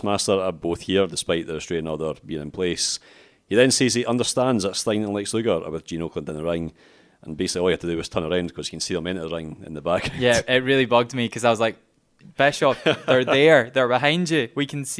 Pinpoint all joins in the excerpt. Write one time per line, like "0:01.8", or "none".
none